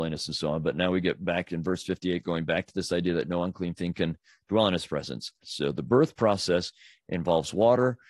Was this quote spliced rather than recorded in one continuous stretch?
yes; 1 cut; at 5.4 s

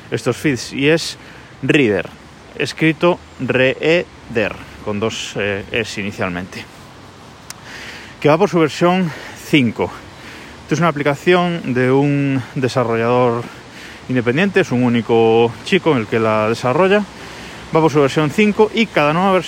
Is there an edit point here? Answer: no; 0 cuts

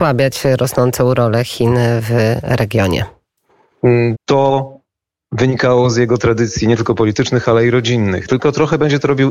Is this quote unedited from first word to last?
no; 2 cuts; at 4.1 s, 8.3 s

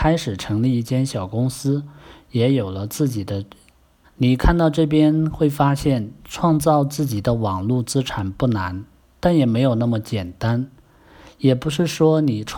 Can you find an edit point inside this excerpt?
yes; 1 cut; at 4.0 s

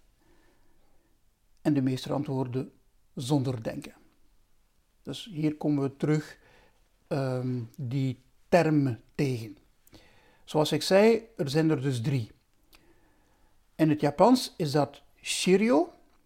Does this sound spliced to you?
no; 0 cuts

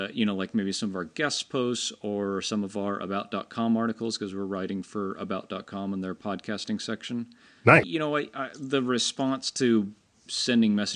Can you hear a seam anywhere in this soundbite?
yes; 1 cut; at 7.8 s

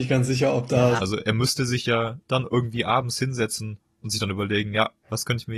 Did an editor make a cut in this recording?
yes; 2 cuts; at 1.0 s, 2.2 s

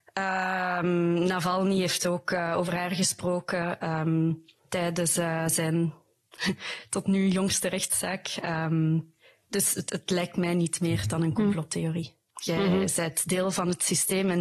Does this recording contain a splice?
yes; 1 cut; at 12.4 s

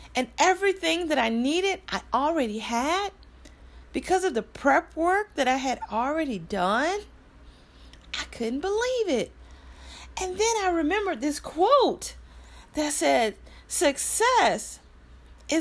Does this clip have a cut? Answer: no; 0 cuts

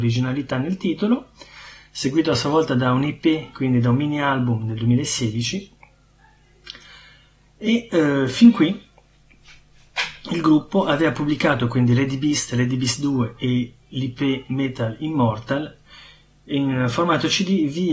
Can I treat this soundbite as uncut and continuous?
yes; 0 cuts

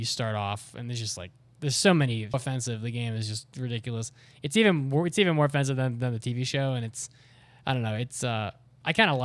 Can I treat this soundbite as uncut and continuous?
no; 1 cut; at 2.3 s

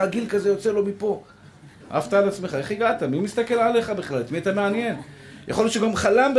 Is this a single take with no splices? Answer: no; 1 cut; at 1.8 s

